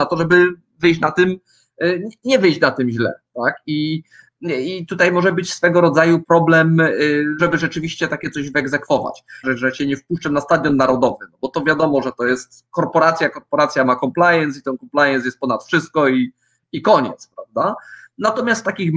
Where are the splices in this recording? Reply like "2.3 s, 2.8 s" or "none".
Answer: 7.4 s, 9.4 s